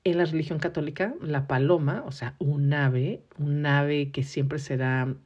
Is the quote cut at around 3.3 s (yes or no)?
no